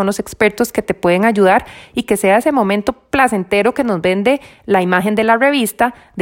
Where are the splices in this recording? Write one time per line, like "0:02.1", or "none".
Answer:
none